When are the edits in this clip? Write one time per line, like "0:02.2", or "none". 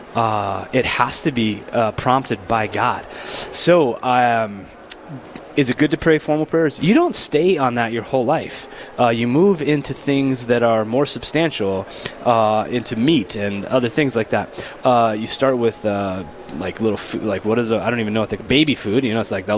0:06.8
0:14.8